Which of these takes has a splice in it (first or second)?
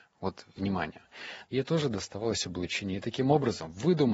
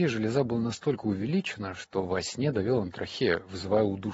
first